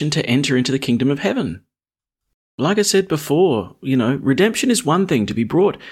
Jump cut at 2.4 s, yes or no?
no